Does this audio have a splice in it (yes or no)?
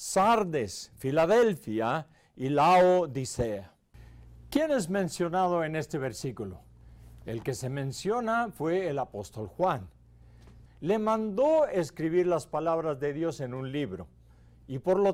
yes